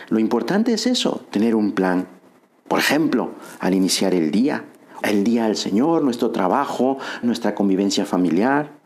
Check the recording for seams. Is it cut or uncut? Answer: cut